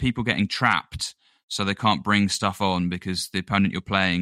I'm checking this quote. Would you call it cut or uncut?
uncut